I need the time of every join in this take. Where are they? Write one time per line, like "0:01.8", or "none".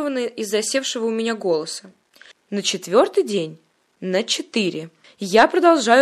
0:02.3